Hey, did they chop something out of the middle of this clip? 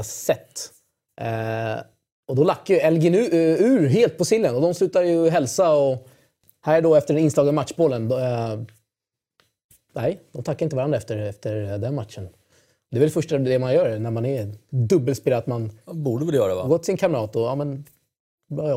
no; 0 cuts

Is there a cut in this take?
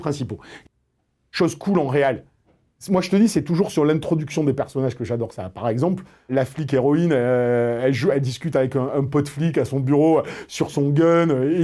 no; 0 cuts

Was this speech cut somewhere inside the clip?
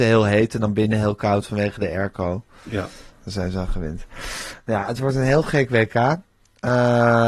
yes; 1 cut; at 3.1 s

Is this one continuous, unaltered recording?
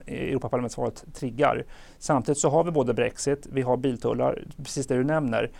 yes; 0 cuts

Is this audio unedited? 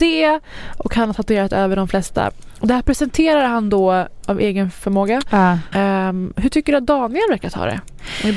no; 2 cuts; at 4.2 s, 5.7 s

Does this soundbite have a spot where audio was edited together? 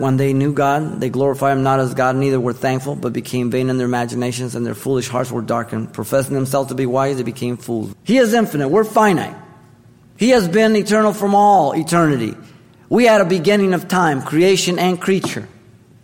yes; 1 cut; at 7.9 s

